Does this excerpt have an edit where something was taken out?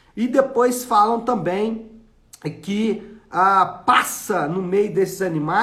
no; 0 cuts

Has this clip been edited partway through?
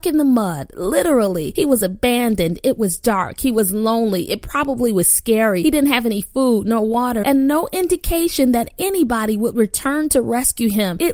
yes; 1 cut; at 7.2 s

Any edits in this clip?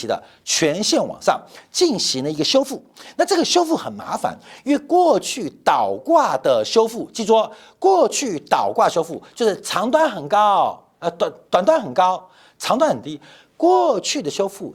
no; 0 cuts

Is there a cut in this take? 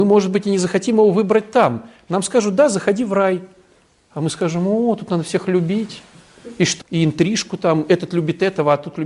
yes; 1 cut; at 6.8 s

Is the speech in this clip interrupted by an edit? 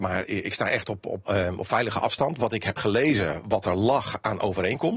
yes; 1 cut; at 1.2 s

